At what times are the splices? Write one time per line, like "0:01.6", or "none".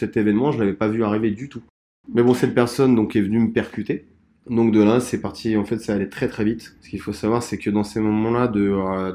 0:06.8